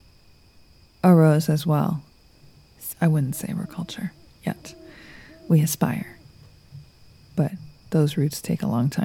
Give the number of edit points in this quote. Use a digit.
1